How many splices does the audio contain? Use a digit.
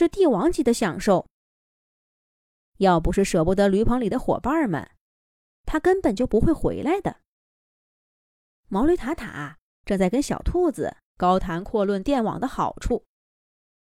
2